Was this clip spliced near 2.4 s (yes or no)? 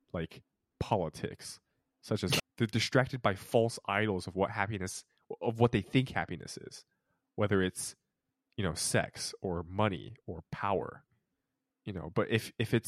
yes